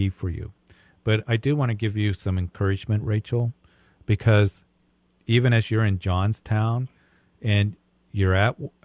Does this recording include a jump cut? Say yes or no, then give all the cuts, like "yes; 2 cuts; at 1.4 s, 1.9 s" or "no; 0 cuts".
no; 0 cuts